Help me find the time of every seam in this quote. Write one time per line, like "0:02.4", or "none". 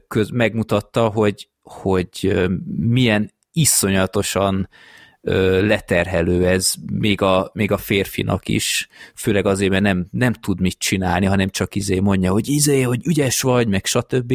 none